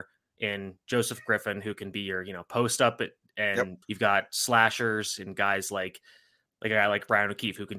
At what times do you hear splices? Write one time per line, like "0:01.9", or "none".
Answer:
0:03.8
0:06.5